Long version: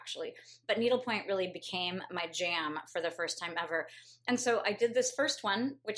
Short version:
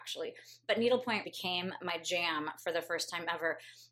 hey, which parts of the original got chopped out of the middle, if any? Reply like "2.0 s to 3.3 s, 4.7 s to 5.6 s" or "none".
1.2 s to 1.5 s